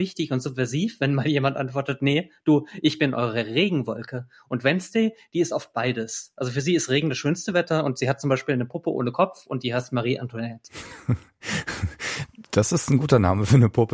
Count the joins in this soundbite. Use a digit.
0